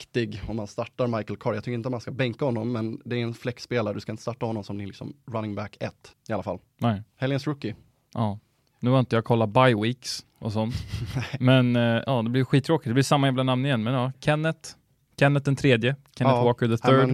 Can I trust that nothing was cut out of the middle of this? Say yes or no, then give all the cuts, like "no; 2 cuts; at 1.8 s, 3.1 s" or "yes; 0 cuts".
no; 1 cut; at 6.1 s